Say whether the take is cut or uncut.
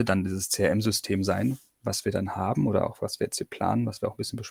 uncut